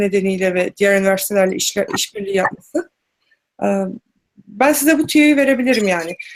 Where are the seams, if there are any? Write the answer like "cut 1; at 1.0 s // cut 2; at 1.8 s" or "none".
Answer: cut 1; at 1.9 s